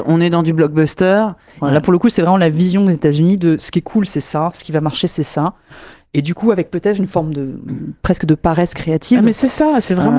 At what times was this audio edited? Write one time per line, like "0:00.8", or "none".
0:01.6